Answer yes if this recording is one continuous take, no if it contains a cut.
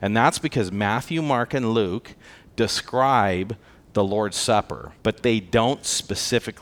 no